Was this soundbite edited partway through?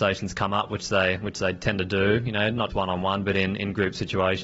yes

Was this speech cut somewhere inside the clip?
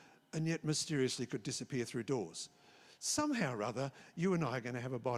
no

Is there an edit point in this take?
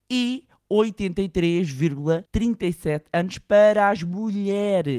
yes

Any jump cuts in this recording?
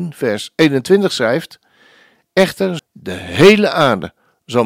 yes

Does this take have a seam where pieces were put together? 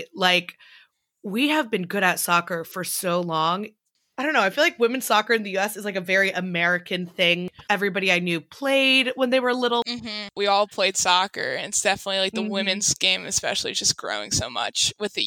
no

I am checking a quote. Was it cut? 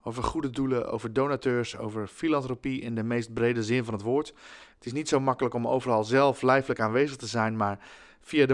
yes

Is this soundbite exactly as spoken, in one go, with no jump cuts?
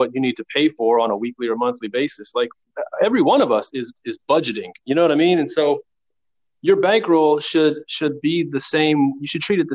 yes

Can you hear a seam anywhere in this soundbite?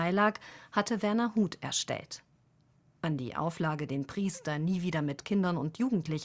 no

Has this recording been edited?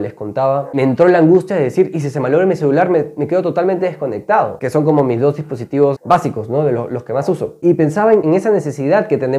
no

